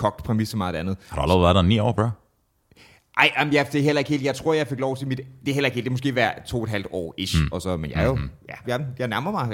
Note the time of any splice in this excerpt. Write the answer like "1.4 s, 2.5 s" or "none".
7.5 s, 8.6 s